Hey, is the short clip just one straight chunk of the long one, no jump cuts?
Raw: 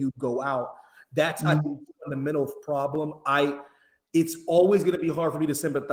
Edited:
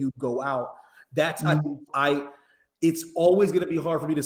no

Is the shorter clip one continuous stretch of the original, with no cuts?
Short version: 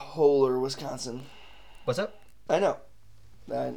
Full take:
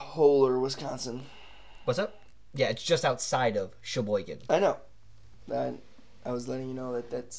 no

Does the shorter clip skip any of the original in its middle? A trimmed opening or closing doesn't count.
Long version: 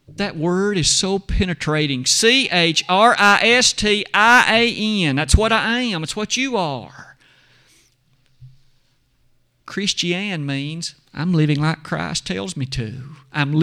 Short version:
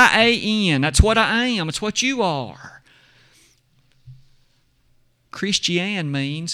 no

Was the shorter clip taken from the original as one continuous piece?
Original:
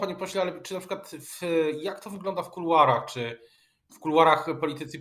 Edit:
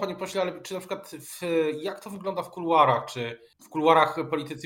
no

